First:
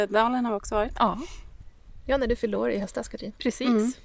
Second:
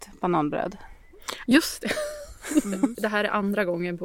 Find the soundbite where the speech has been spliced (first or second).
second